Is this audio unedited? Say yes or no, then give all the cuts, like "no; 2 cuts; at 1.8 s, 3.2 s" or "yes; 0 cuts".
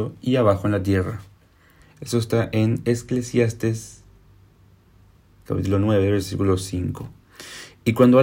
no; 1 cut; at 1.8 s